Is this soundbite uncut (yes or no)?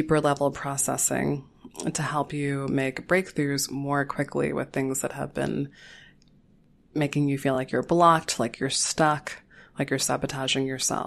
yes